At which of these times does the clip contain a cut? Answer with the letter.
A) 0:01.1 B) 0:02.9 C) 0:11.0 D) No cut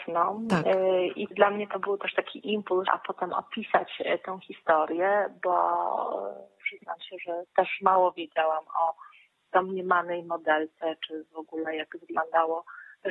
B